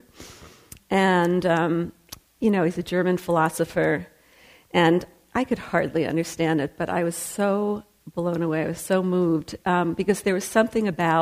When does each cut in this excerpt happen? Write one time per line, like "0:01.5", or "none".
none